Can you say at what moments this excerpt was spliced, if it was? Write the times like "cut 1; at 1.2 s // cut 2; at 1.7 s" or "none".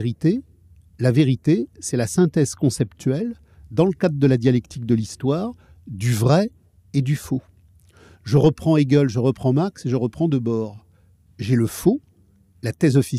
none